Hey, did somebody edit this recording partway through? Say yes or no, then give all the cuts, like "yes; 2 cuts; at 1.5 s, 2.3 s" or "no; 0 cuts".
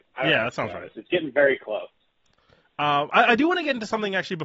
no; 0 cuts